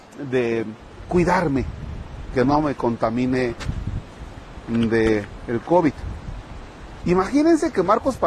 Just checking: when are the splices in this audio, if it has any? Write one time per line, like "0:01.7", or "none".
0:07.0